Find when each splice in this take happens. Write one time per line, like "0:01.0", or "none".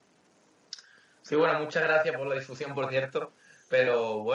none